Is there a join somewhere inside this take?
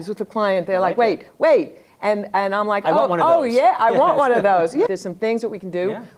yes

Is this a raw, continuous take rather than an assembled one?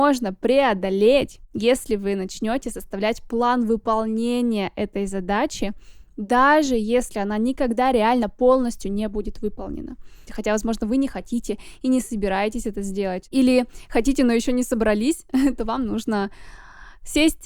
no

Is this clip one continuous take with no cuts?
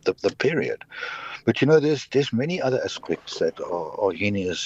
no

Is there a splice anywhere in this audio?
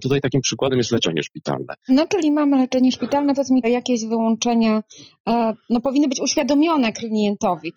yes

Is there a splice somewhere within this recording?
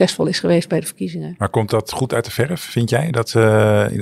no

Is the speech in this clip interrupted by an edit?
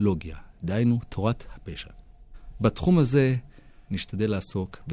yes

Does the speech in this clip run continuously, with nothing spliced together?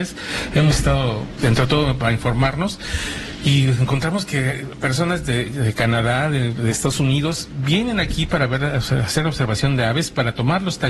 no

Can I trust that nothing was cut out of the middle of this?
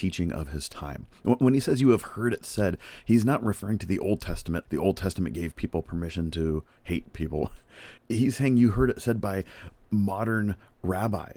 no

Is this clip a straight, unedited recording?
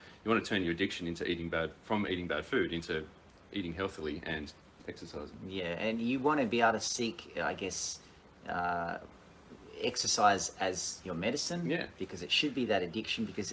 yes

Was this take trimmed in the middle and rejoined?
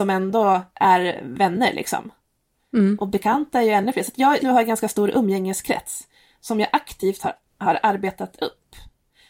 yes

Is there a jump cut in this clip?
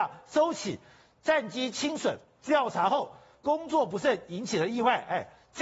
no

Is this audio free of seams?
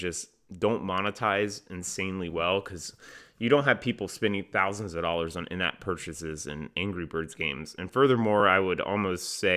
yes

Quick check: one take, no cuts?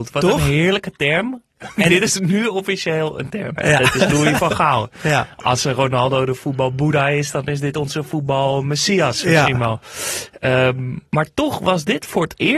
no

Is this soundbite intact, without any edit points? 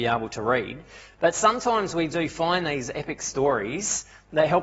yes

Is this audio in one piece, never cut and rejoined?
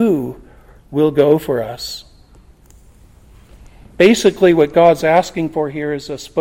yes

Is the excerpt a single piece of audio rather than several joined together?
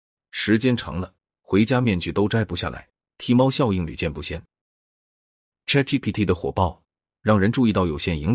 yes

